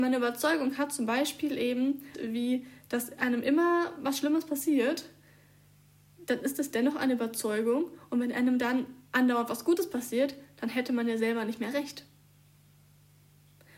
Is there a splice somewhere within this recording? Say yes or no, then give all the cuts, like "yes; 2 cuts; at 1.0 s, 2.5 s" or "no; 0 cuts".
yes; 1 cut; at 2.1 s